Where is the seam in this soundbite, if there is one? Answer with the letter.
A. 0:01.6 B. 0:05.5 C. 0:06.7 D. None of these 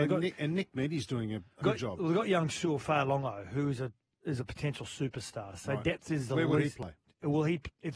A